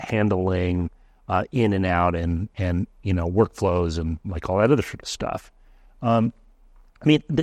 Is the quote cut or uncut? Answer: uncut